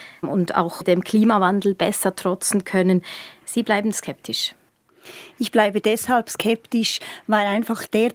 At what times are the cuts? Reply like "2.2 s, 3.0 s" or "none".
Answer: none